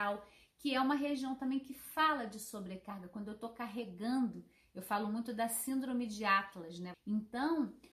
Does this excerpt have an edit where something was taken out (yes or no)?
yes